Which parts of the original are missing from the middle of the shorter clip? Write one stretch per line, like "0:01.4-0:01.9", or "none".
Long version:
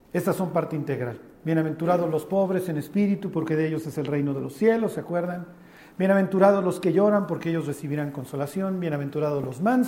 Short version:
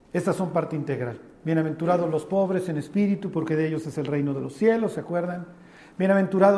none